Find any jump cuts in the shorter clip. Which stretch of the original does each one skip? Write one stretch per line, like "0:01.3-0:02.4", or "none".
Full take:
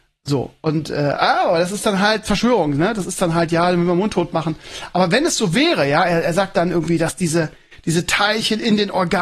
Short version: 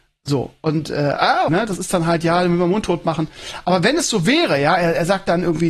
0:01.5-0:02.8